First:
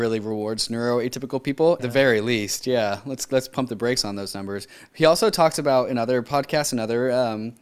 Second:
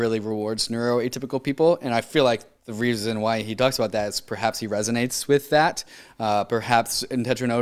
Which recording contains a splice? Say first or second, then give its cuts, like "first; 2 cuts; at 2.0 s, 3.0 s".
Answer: first; 1 cut; at 1.8 s